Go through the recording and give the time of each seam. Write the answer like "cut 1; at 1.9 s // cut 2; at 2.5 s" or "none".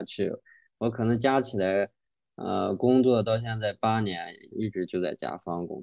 cut 1; at 4.5 s